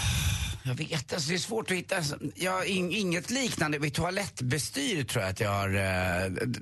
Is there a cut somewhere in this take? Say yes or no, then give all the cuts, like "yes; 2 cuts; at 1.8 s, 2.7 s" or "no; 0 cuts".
no; 0 cuts